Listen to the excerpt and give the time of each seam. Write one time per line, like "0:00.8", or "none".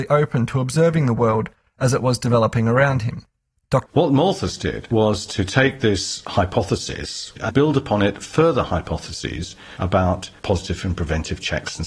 0:03.9
0:07.5